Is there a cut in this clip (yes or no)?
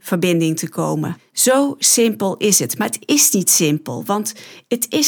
no